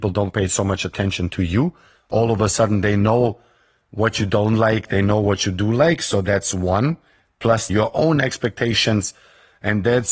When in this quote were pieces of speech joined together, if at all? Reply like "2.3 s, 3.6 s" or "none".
7.7 s